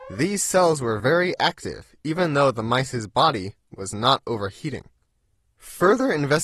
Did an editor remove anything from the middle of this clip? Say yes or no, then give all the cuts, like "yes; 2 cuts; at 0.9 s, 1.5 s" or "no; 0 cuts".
no; 0 cuts